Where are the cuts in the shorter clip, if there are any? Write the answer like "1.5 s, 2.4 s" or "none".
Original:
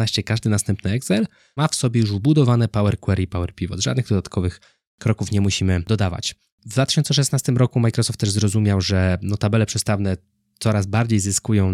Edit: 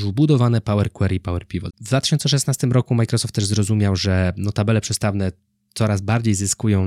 1.7 s